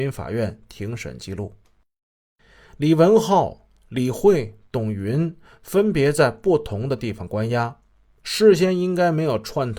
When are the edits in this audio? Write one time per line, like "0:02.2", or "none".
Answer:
none